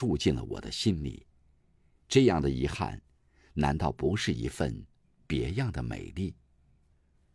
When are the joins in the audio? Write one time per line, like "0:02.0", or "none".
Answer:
none

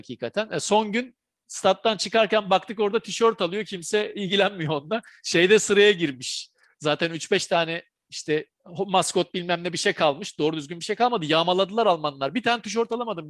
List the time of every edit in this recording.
0:06.7

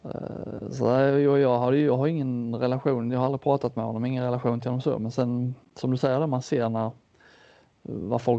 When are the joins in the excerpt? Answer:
none

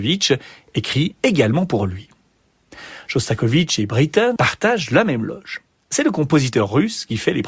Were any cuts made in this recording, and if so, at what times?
0:04.4

